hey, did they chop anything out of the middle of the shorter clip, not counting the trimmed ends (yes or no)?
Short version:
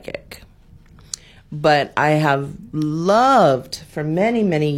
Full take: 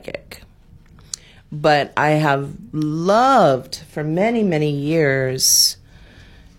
no